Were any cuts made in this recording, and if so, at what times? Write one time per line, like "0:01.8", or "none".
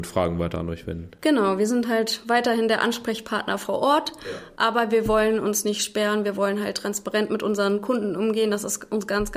none